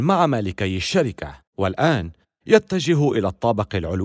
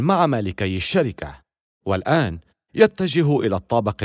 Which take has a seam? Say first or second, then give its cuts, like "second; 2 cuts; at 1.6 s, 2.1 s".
first; 1 cut; at 1.5 s